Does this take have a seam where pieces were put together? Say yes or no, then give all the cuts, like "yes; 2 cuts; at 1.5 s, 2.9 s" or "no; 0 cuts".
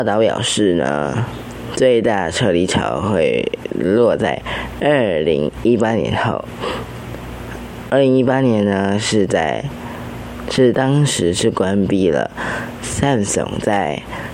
yes; 1 cut; at 10.7 s